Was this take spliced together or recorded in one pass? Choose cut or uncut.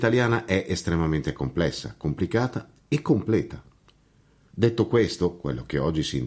cut